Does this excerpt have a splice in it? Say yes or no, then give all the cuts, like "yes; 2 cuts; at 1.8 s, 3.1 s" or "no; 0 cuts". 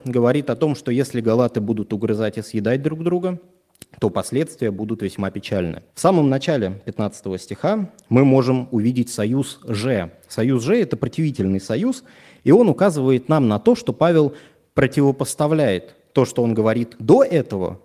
yes; 1 cut; at 5.9 s